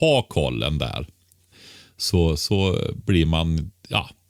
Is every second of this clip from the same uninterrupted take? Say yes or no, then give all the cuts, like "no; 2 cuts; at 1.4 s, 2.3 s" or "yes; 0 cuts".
yes; 0 cuts